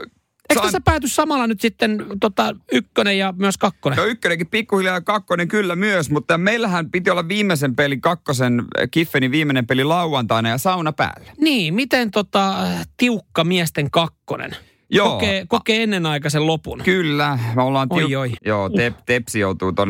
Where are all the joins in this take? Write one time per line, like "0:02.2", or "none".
0:18.4